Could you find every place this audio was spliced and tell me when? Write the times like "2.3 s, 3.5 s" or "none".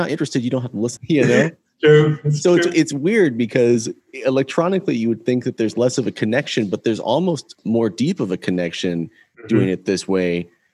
1.0 s